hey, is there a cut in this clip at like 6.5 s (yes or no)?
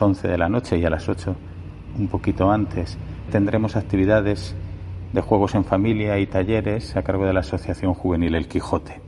no